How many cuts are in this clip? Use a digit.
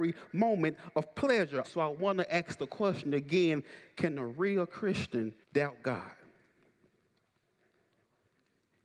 2